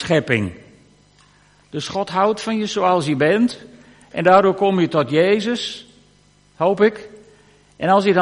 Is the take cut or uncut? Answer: uncut